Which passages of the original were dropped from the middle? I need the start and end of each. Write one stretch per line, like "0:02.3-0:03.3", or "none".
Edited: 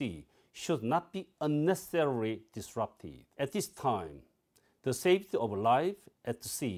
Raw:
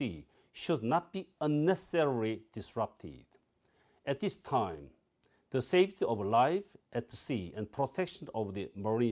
0:03.3-0:04.0